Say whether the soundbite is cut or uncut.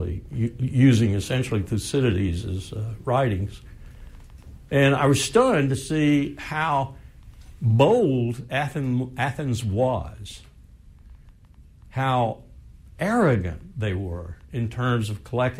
uncut